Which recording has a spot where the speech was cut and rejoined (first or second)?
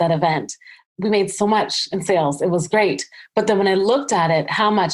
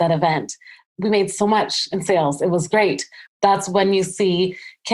second